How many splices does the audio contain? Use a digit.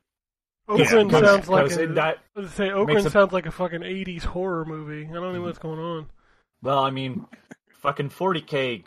2